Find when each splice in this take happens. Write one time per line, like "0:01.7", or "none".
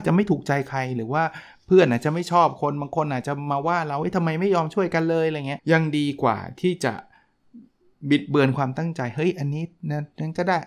0:05.6